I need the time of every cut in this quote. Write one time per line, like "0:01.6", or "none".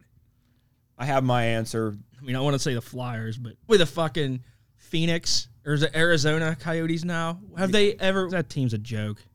0:03.7
0:08.3